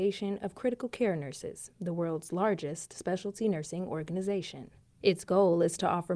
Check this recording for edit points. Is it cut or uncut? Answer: cut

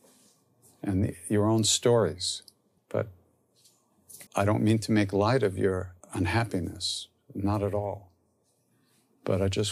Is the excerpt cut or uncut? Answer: cut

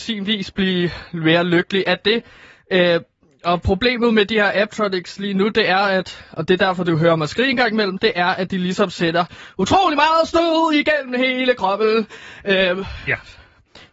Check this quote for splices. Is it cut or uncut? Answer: uncut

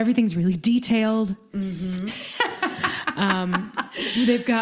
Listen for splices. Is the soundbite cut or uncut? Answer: cut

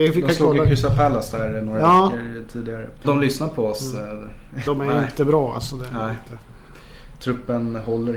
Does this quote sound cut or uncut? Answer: cut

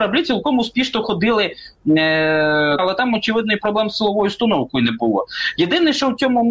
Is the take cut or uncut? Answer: cut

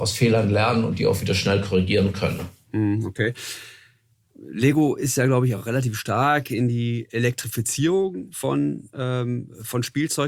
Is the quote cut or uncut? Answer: uncut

